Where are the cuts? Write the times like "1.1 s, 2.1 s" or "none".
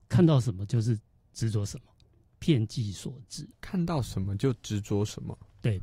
3.5 s